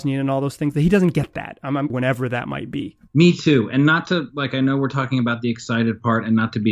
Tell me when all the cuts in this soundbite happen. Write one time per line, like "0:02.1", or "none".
0:01.9
0:03.1